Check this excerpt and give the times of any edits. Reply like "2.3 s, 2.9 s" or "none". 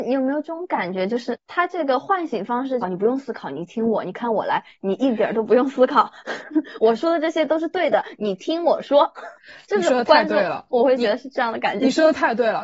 2.8 s, 8.2 s